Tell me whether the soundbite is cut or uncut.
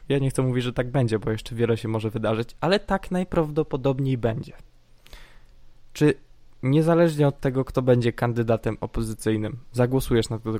uncut